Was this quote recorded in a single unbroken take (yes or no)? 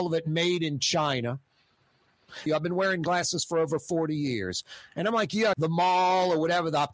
no